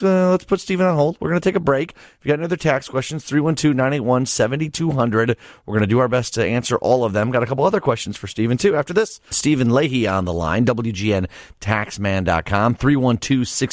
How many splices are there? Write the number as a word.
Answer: one